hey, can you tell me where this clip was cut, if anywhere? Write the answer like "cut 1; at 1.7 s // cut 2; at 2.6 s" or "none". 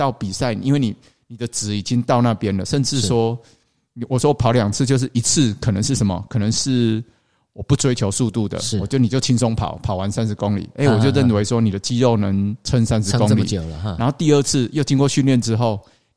none